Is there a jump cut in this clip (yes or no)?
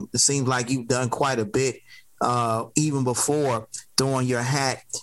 no